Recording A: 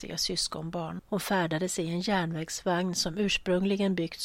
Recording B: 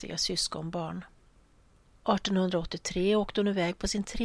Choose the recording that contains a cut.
A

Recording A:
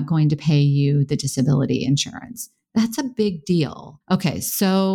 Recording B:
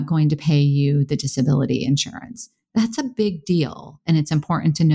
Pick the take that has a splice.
A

